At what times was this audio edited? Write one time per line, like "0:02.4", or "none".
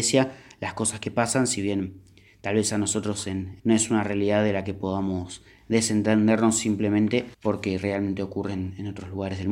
0:03.6
0:07.3